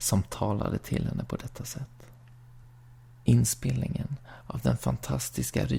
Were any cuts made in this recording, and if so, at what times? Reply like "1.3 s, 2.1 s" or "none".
none

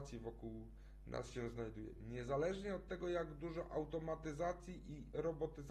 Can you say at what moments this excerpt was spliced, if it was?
none

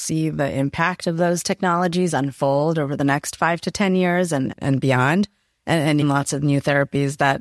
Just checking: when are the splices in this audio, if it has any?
4.5 s, 6.0 s

